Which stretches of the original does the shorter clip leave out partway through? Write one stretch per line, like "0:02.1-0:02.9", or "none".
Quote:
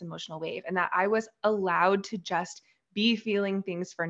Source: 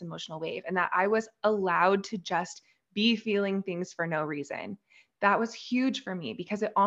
none